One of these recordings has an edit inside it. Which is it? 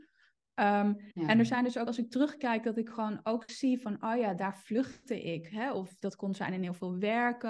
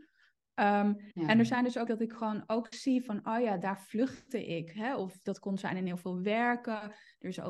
second; 1 cut; at 1.9 s

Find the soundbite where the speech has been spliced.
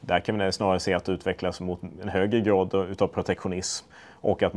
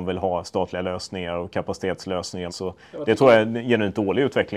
second; 1 cut; at 2.5 s

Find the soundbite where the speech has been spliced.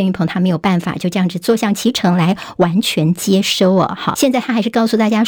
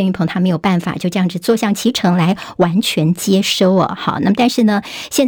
first; 1 cut; at 4.1 s

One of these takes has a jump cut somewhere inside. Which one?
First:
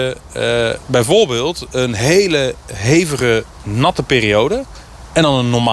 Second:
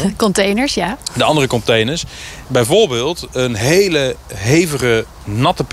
second; 1 cut; at 2.4 s

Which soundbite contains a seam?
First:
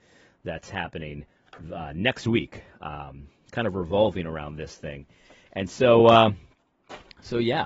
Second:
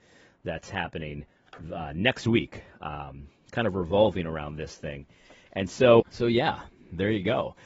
second; 1 cut; at 6.0 s

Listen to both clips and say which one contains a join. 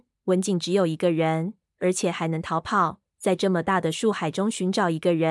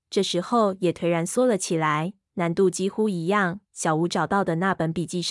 second; 2 cuts; at 2.2 s, 3.6 s

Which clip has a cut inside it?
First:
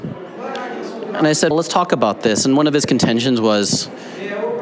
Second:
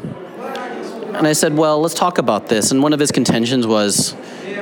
first; 1 cut; at 1.5 s

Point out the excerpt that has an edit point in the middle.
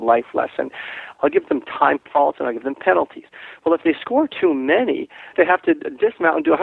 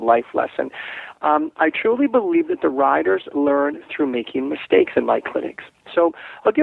first; 2 cuts; at 1.2 s, 5.3 s

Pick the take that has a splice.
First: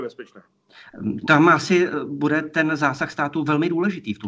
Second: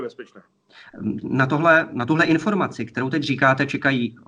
first; 1 cut; at 1.2 s

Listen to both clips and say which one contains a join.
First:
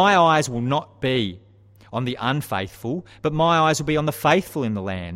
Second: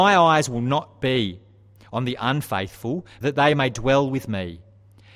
second; 1 cut; at 3.2 s

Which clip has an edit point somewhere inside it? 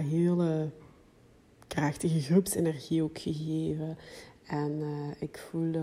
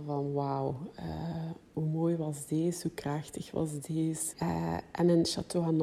second; 1 cut; at 4.3 s

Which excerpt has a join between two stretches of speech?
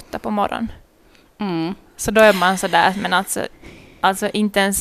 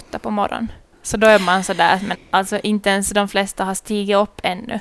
second; 2 cuts; at 0.9 s, 2.1 s

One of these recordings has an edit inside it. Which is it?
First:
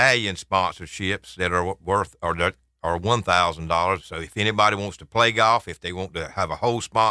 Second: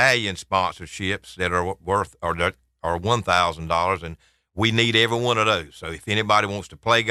first; 1 cut; at 4.0 s

